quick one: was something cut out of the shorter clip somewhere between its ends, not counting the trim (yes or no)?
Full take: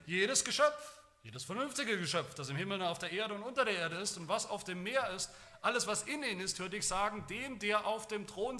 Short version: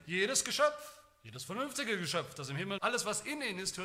yes